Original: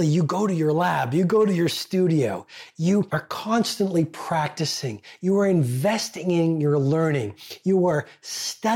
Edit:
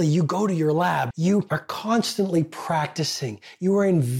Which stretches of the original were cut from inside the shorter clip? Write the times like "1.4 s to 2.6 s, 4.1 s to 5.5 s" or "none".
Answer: 1.1 s to 2.7 s

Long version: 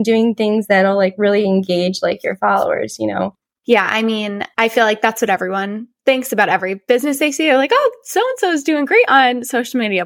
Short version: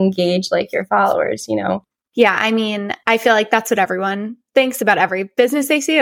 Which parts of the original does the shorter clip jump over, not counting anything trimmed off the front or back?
none

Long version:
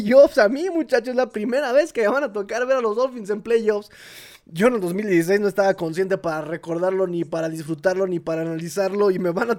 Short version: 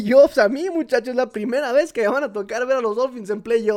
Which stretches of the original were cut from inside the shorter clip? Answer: none

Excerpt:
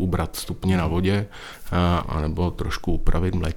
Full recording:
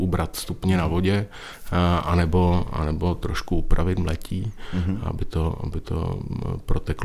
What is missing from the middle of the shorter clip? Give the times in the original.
2.0 s to 2.7 s

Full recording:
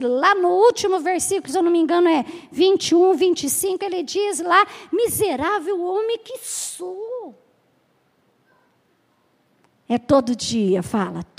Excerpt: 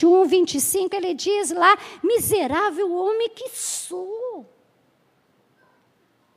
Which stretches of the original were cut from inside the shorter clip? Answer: none

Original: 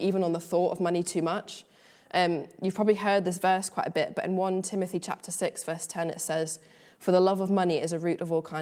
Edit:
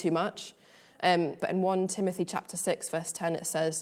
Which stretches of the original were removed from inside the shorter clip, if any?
2.5 s to 4.1 s

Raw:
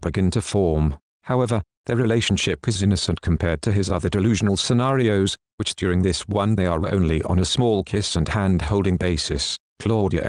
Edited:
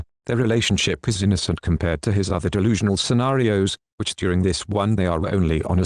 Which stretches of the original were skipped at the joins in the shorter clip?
none

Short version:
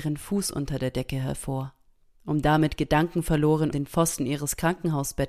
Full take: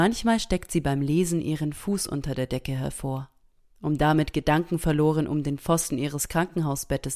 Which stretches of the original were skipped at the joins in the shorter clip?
5.3 s to 5.4 s

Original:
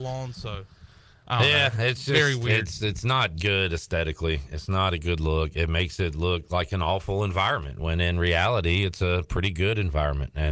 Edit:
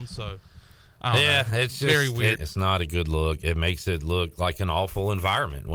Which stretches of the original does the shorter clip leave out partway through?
2.6 s to 4.5 s

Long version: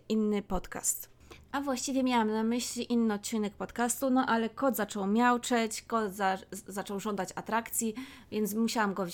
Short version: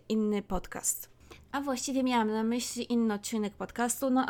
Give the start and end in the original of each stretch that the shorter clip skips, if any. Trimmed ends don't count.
none

